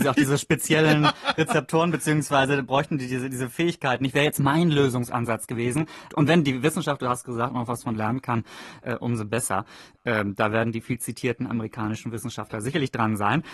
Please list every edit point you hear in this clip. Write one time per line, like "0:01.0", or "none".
0:06.1